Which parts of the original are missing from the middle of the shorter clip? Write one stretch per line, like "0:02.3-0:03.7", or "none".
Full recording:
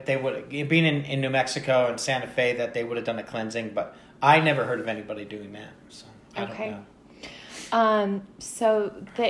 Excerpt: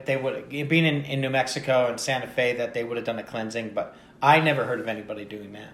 none